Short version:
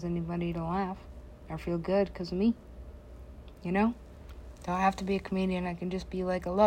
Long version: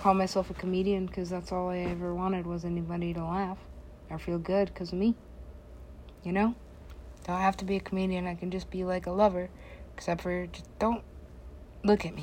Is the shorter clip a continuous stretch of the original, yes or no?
yes